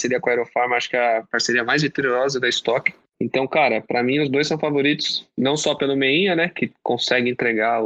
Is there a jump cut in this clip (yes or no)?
no